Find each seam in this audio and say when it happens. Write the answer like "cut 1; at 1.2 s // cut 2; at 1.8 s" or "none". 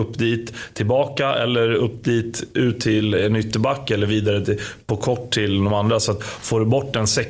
none